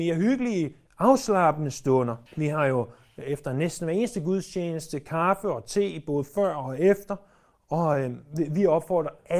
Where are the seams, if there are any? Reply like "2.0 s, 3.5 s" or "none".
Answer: 2.3 s

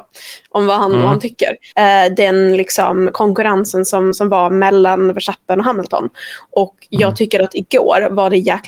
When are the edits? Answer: 1.7 s

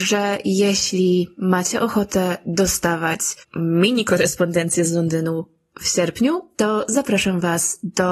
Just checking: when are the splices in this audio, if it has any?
3.4 s

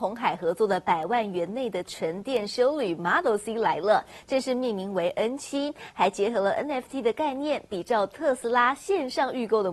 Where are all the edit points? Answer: none

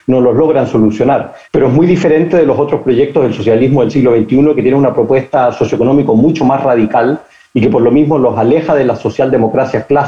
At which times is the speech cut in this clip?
1.4 s

